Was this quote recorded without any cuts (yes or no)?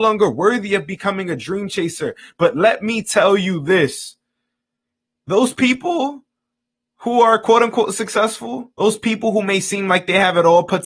no